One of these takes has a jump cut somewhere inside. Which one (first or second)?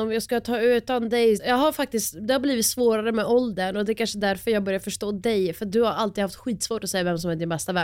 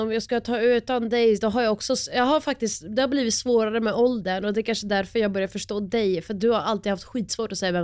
first